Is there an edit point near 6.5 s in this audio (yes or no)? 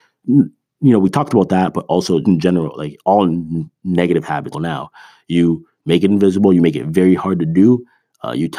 no